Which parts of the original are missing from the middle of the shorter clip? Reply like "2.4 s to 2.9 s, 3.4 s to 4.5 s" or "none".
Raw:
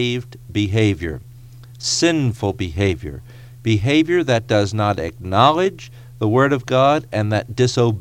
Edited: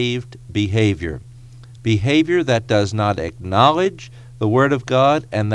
1.8 s to 3.6 s